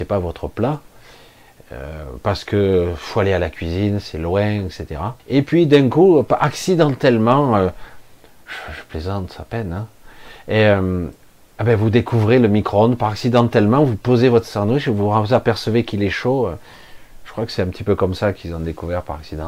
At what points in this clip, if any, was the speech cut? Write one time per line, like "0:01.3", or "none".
0:05.2

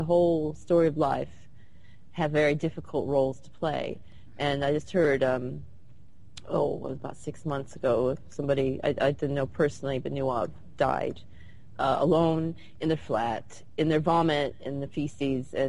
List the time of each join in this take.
none

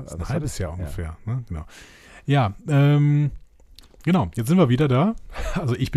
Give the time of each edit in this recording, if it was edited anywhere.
none

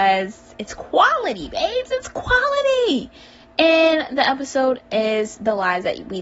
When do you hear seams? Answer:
none

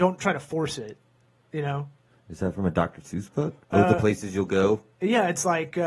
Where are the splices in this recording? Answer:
0:03.6

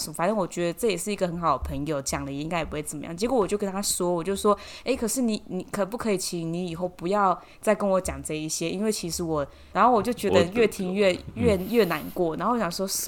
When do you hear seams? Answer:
0:09.7

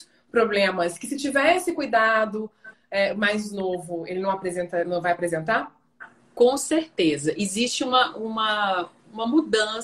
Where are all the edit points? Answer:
0:04.8

